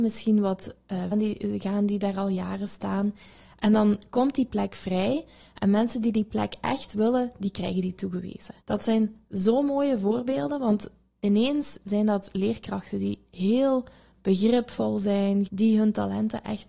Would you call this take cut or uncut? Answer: cut